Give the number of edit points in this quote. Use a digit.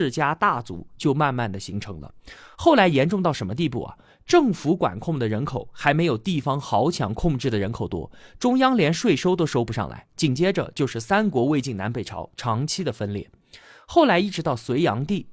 0